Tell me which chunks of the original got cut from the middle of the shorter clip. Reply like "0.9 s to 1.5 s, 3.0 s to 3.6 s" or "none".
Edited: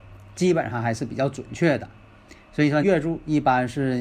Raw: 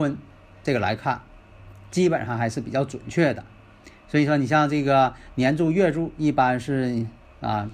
4.4 s to 5.7 s